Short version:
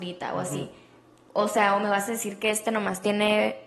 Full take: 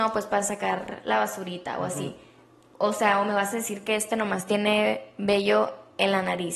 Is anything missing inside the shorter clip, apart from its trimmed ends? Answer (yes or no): no